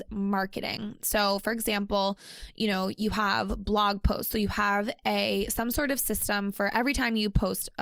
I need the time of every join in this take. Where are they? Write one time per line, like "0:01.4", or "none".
none